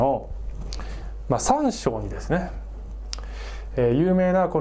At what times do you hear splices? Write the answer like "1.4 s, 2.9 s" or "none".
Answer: none